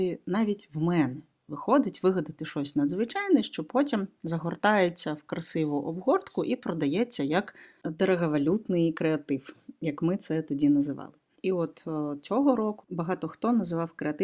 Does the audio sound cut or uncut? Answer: cut